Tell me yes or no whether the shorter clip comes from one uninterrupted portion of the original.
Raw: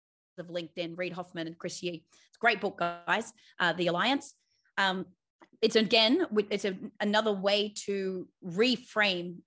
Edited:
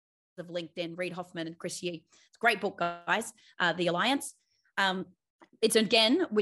yes